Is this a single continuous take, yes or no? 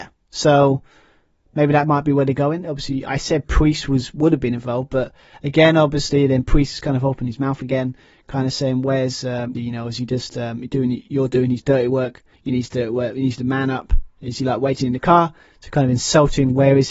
no